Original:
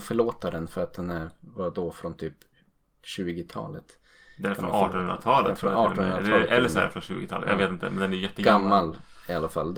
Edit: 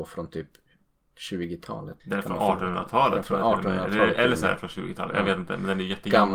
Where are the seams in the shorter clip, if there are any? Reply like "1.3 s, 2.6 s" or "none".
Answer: 2.0 s